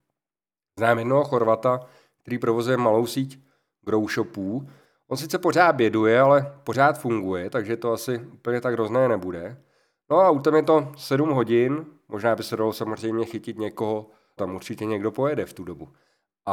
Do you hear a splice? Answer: yes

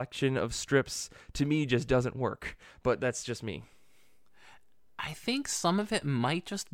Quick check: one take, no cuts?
yes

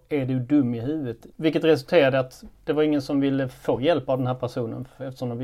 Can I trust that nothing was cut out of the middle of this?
no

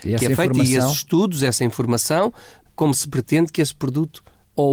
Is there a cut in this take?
yes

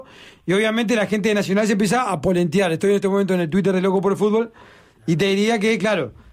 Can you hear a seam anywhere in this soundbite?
no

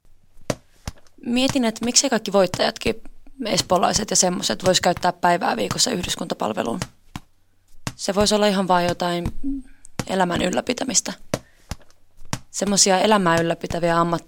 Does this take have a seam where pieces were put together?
no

